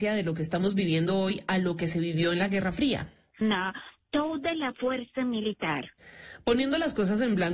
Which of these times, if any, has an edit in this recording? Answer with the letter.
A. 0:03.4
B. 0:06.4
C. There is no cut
A